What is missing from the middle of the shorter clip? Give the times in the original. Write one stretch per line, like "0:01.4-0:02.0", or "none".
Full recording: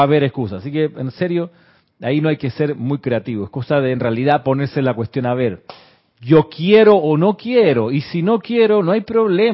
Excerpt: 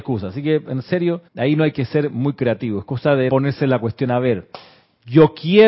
0:01.6-0:01.9
0:03.9-0:04.4